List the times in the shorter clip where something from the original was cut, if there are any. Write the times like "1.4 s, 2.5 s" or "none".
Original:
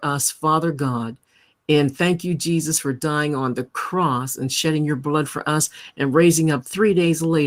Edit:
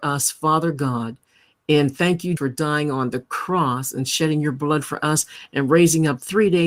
2.4 s